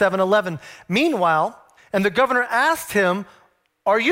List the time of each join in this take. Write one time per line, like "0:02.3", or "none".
0:01.8

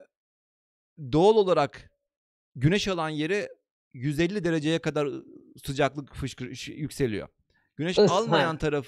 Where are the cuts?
none

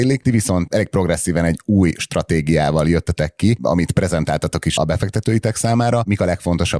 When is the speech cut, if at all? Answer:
0:04.8

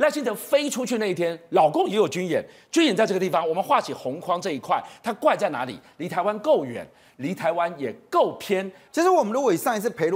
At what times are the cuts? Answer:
0:08.9

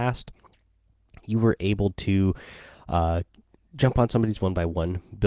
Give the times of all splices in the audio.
none

